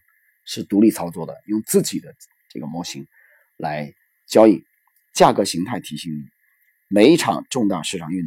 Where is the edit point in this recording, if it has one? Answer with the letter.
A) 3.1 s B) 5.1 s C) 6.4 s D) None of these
B